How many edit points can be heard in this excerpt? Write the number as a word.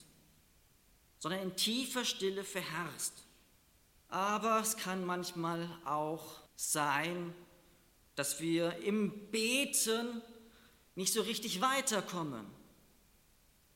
two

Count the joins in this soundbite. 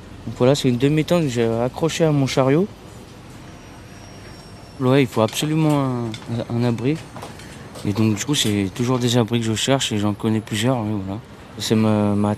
one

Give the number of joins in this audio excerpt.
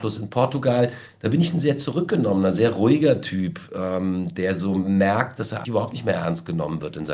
one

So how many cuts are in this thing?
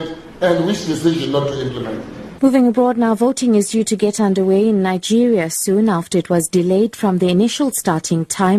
one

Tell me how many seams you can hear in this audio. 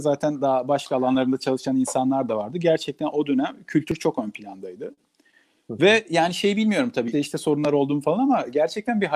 one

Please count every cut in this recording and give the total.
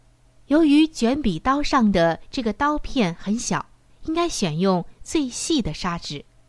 one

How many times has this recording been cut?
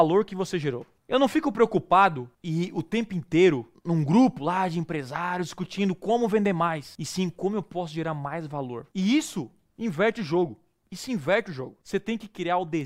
one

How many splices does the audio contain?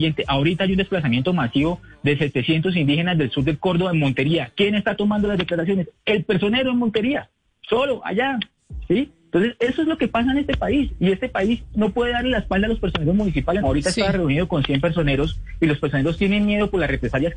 one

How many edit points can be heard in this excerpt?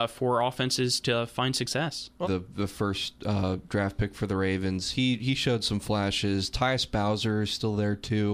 one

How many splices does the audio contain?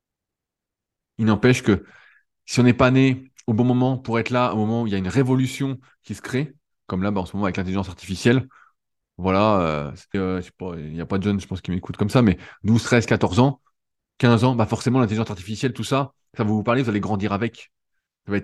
one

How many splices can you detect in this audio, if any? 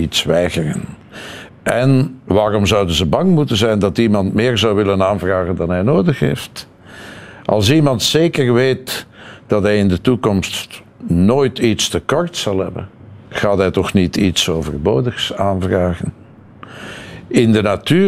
two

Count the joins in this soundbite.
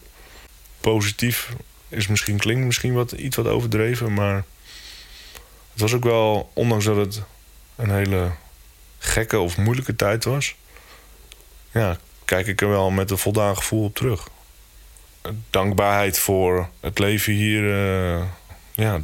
one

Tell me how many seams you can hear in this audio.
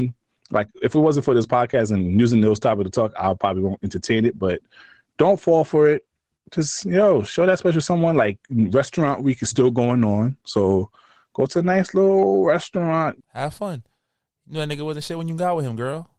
one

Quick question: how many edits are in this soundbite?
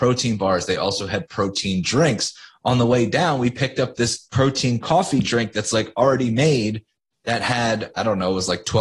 zero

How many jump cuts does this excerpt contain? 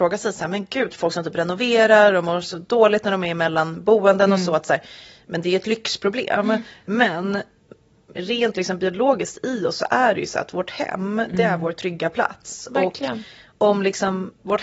zero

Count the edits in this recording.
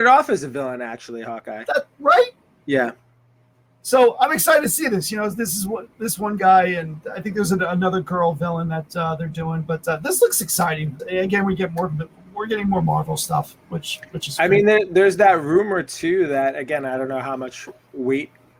one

